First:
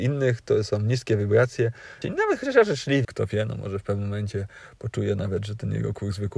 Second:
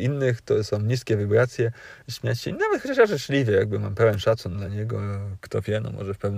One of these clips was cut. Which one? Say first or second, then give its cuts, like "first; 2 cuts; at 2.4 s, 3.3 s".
first; 2 cuts; at 2.0 s, 3.0 s